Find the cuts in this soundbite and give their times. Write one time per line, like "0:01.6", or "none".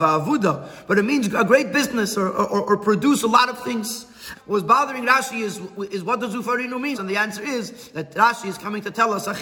0:04.3
0:06.9